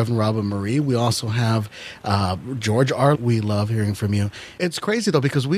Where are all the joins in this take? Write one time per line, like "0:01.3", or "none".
0:03.1
0:04.6